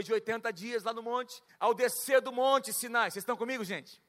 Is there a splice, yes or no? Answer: yes